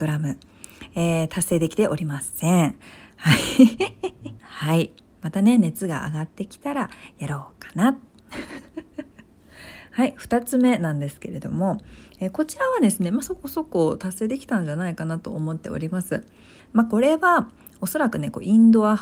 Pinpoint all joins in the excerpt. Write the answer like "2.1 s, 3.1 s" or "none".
4.4 s, 16.6 s